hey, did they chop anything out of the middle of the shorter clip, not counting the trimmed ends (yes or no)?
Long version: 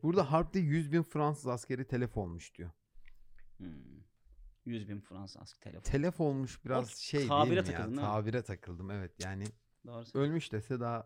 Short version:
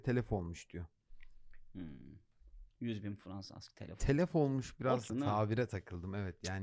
yes